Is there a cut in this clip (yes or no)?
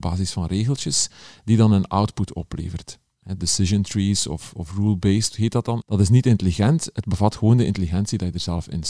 yes